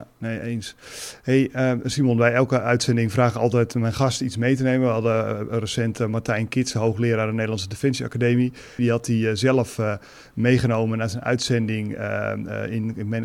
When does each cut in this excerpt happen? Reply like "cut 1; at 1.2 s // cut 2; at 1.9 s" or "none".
cut 1; at 8.8 s